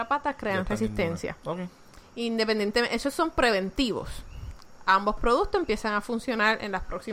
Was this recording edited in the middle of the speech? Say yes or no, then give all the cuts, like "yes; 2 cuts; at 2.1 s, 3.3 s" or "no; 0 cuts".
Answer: no; 0 cuts